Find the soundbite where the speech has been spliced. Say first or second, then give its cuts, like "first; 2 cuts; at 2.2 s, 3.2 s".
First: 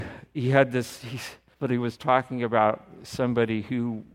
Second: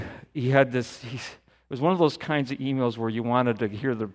first; 1 cut; at 1.5 s